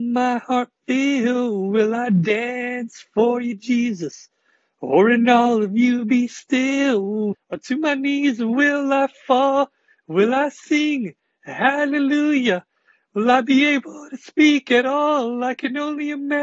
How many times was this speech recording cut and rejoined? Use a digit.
1